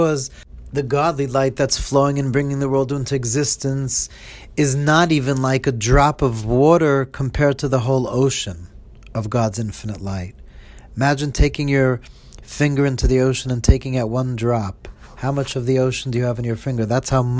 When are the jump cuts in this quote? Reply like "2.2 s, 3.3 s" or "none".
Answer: none